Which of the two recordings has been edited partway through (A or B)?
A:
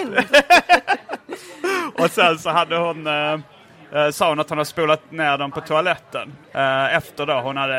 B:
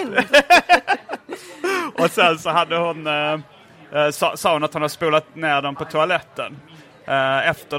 A